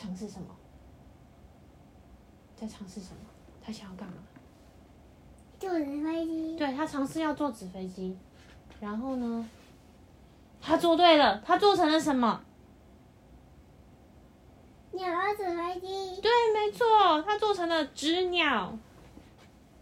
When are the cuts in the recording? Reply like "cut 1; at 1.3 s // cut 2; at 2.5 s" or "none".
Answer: none